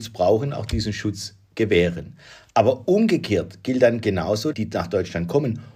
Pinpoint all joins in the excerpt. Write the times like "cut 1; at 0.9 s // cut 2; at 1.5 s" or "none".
cut 1; at 4.5 s